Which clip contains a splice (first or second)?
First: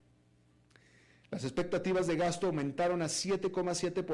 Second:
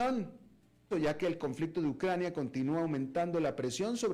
second